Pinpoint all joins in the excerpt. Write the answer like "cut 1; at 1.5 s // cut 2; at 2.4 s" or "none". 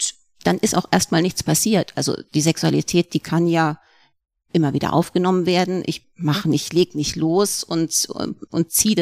cut 1; at 6.1 s